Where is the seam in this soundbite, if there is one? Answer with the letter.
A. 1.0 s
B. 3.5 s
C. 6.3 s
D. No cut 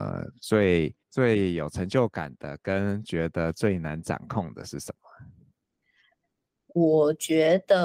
A